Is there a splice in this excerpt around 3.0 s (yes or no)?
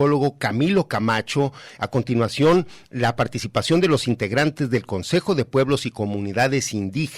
no